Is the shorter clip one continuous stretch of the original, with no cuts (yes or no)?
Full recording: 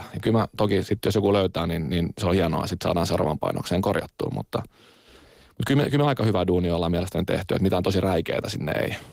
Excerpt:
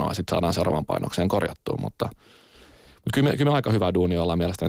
yes